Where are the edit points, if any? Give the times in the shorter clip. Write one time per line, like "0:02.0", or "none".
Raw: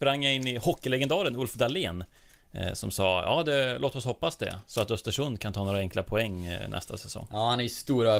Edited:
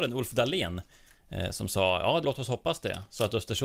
0:02.2